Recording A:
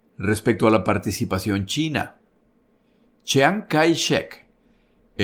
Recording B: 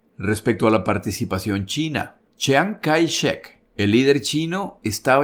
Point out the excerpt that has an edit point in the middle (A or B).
B